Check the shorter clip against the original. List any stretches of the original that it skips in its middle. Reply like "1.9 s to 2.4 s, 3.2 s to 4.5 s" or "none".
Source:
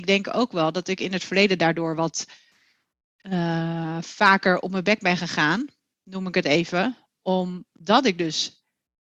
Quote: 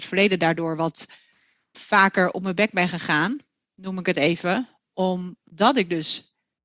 2.9 s to 4.0 s